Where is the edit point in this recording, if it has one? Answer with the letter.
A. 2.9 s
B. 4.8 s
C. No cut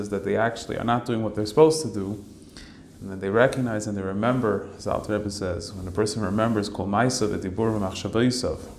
C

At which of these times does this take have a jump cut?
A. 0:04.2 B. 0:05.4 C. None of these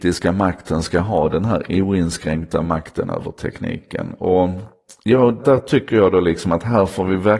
B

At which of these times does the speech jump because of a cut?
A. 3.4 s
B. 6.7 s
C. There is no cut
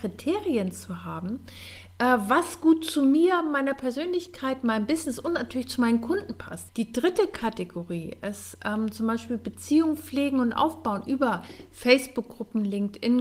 B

